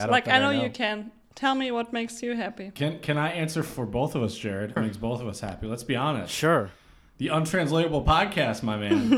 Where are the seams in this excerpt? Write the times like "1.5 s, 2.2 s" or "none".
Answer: 4.8 s